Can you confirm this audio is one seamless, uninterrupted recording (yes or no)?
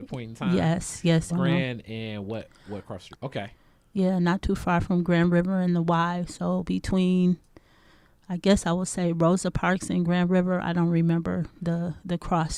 no